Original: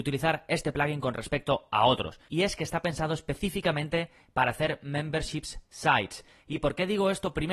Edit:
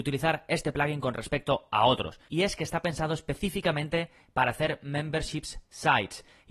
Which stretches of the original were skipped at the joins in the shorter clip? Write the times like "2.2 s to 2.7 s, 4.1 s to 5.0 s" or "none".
none